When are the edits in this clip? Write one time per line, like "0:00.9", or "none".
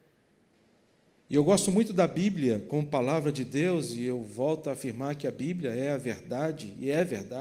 0:01.2